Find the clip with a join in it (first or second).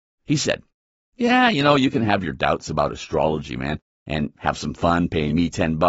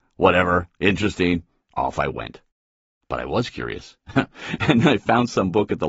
first